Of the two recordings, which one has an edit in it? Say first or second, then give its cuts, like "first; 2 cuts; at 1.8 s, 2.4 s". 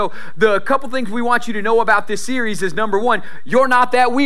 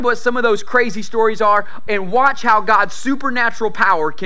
second; 1 cut; at 1.9 s